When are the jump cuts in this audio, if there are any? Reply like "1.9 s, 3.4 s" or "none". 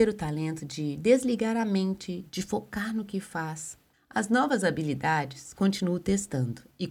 2.3 s, 3.9 s

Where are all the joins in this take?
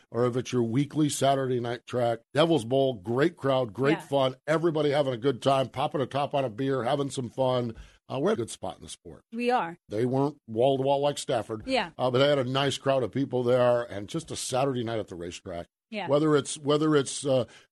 2.2 s, 8.4 s, 9.9 s

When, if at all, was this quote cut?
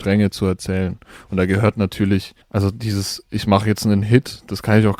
2.4 s

